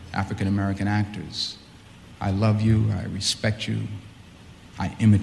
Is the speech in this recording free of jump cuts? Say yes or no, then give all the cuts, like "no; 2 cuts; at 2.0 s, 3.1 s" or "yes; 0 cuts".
yes; 0 cuts